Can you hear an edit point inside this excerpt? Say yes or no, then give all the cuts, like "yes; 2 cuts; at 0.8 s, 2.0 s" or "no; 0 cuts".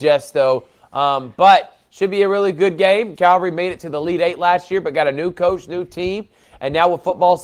yes; 1 cut; at 3.2 s